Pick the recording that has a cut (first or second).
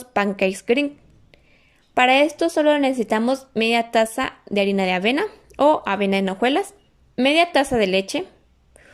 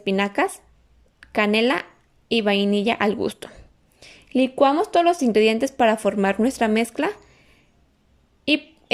first